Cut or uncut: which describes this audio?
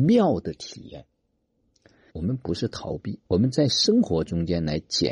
cut